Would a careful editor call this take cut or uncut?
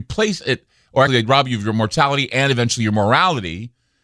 cut